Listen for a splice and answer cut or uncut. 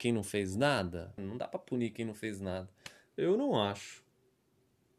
cut